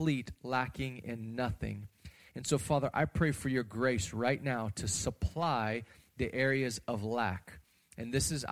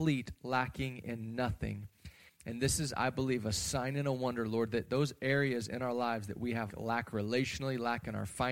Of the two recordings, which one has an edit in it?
second; 2 cuts; at 2.3 s, 6.7 s

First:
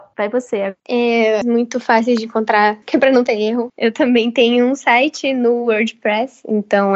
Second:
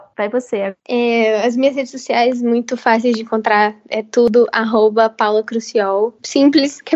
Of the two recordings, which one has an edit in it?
first; 2 cuts; at 1.4 s, 2.8 s

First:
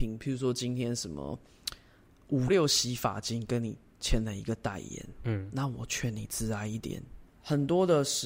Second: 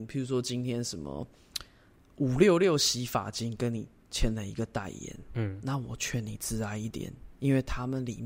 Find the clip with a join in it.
first; 2 cuts; at 2.5 s, 7.3 s

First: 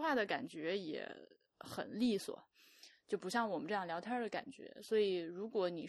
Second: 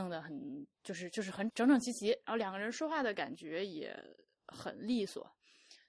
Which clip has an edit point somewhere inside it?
second; 1 cut; at 1.5 s

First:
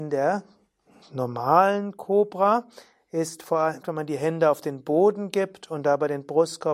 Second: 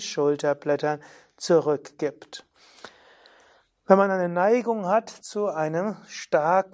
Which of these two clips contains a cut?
first; 1 cut; at 3.8 s

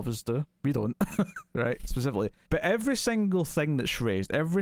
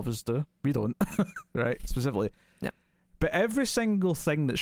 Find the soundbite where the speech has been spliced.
first; 1 cut; at 2.4 s

